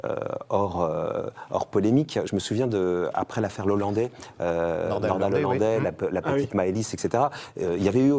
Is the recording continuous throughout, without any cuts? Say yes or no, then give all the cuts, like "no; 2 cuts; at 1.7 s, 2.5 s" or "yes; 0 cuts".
yes; 0 cuts